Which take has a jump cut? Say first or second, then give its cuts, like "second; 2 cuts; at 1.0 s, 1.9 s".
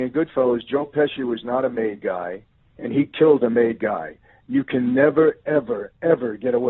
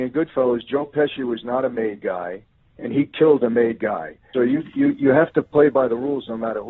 second; 1 cut; at 4.3 s